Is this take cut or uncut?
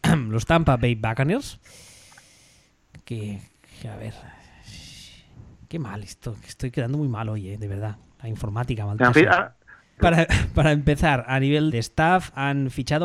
cut